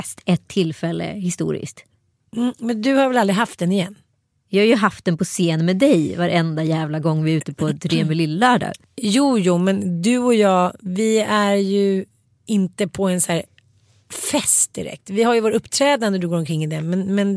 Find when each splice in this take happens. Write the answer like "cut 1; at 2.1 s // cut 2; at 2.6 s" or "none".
none